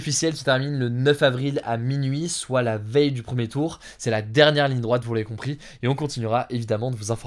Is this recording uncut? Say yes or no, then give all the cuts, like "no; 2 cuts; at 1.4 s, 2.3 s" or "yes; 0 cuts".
yes; 0 cuts